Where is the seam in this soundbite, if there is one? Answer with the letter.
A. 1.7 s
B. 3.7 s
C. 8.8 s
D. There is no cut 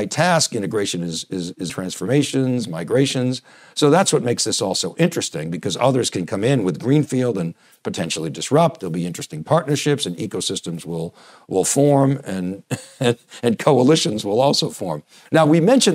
A